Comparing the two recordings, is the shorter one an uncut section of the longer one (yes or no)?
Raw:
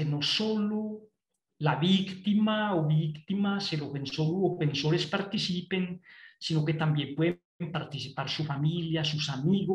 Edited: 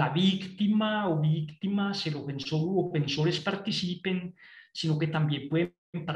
yes